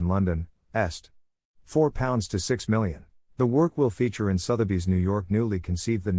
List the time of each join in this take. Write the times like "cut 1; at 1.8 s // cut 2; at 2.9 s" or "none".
cut 1; at 3.2 s